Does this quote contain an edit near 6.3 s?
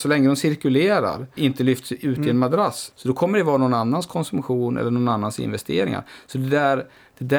no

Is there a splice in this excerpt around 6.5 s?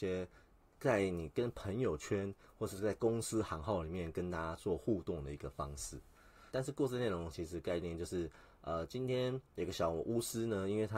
yes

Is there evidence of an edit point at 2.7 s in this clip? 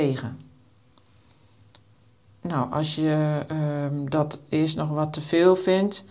no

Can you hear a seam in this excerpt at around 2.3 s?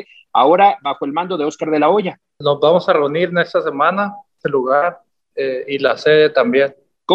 no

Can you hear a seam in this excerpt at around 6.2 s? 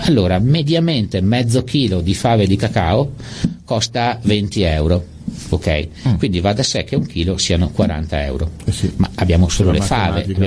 no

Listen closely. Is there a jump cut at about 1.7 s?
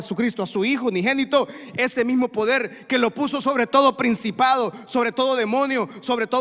yes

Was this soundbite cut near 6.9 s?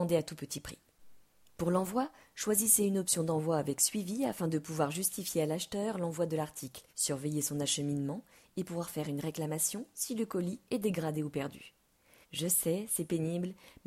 yes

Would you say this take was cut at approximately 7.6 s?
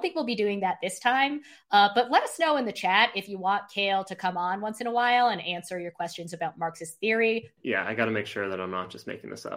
yes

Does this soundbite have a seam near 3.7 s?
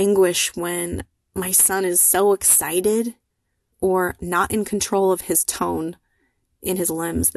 yes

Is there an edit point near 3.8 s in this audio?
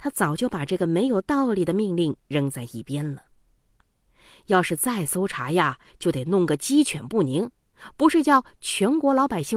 yes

